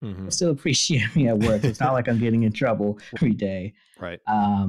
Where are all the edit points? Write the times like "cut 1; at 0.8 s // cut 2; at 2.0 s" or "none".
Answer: cut 1; at 3.2 s